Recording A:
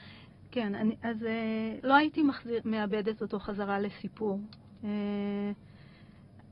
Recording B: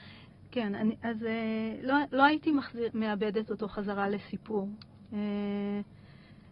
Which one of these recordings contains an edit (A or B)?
A